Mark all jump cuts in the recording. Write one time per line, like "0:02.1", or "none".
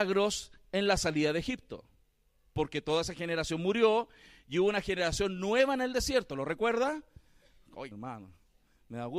0:07.9